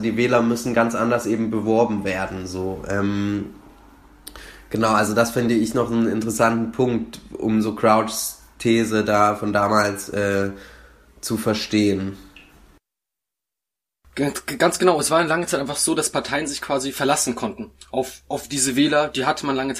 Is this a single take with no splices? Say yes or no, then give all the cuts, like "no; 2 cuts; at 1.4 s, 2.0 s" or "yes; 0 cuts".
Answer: yes; 0 cuts